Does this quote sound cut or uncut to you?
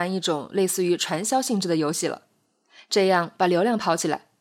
uncut